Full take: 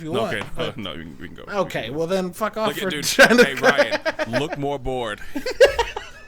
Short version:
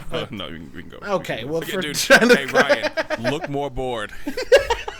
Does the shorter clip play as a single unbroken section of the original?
no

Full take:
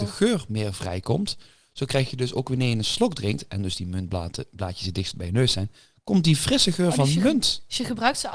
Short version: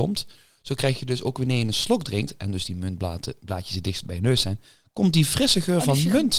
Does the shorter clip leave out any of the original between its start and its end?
no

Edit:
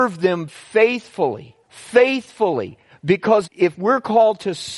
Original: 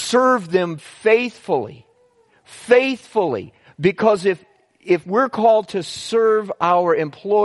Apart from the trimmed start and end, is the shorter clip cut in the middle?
yes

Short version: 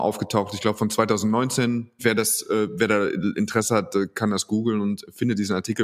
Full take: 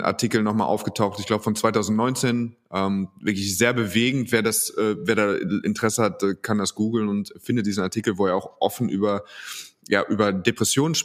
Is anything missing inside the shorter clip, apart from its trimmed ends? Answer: yes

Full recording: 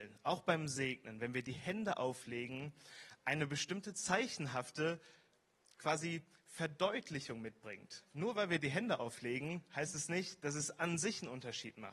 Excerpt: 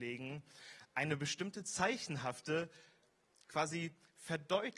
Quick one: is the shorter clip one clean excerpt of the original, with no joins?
yes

